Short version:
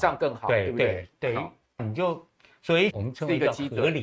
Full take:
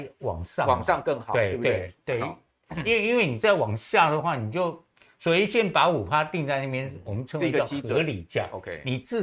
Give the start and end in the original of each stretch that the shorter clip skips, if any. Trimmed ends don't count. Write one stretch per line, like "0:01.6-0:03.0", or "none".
0:02.6-0:04.4
0:05.5-0:07.0